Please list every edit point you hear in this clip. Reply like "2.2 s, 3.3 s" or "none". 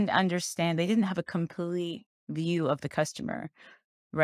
none